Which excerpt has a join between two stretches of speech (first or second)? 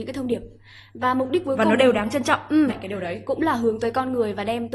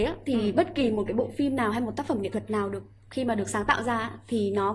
first